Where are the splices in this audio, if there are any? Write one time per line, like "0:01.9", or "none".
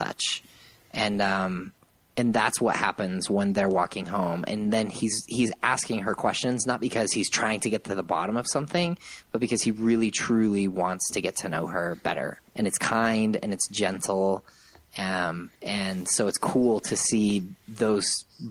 0:12.5
0:15.6